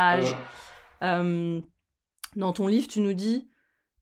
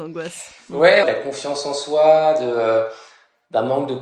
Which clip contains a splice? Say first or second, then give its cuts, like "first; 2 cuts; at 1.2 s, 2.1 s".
second; 1 cut; at 1.0 s